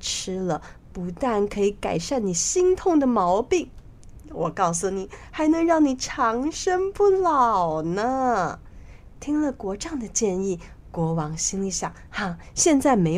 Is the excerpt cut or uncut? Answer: uncut